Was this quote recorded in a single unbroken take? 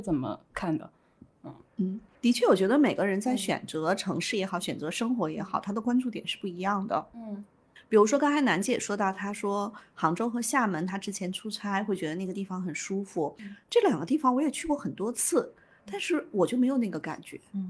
yes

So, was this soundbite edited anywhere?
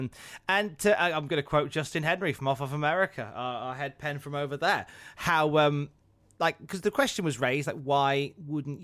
no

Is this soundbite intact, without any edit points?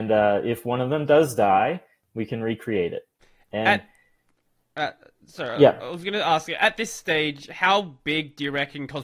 yes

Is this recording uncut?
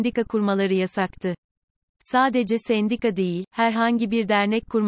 yes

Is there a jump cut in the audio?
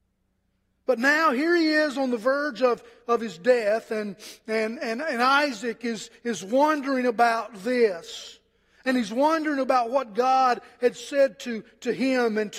no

